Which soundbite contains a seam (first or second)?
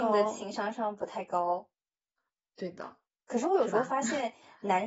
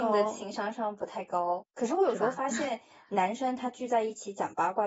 second